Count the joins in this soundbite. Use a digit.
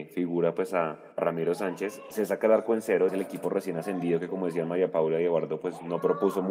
2